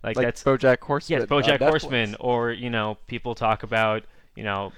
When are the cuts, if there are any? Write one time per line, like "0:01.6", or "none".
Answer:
none